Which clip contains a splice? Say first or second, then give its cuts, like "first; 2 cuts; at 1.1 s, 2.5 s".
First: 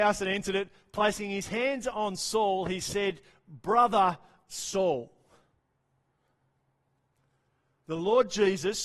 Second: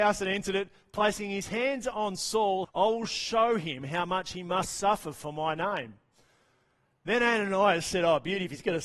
second; 1 cut; at 2.6 s